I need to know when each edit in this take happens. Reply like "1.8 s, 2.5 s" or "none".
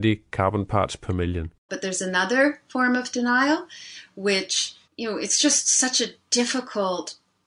1.7 s, 4.8 s